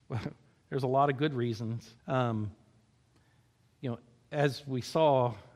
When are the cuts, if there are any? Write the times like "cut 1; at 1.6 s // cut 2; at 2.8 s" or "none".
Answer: cut 1; at 2.0 s